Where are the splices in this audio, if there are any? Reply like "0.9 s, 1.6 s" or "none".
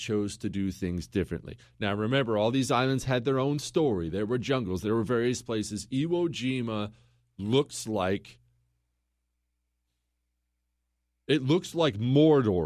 none

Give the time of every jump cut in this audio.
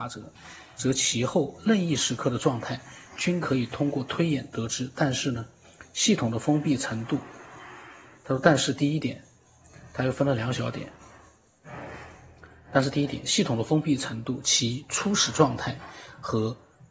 none

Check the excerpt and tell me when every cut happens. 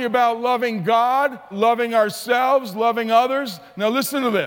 1.5 s

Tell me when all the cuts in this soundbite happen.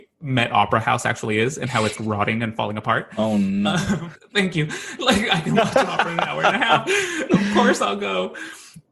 2.0 s, 4.2 s

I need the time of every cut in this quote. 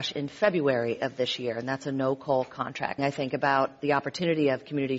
3.0 s

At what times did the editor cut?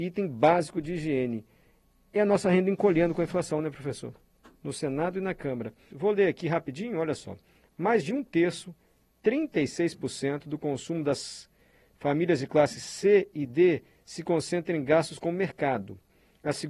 4.6 s, 5.9 s

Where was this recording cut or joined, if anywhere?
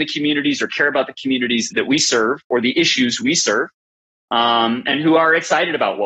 1.7 s

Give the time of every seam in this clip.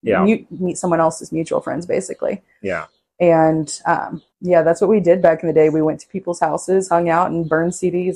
4.3 s

